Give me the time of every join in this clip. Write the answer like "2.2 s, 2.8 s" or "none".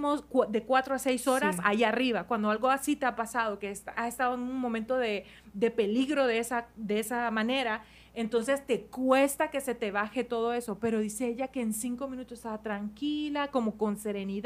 none